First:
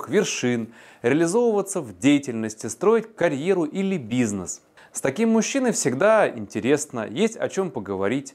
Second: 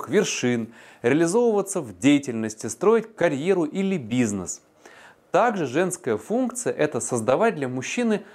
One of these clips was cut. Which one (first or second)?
first